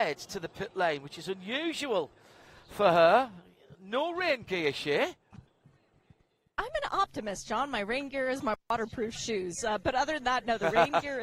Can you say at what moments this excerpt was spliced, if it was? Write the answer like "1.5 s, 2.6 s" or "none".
none